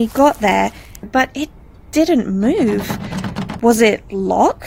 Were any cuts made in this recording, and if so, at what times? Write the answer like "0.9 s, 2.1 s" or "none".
1.0 s